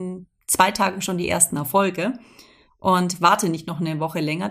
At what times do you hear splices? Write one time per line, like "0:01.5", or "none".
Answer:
none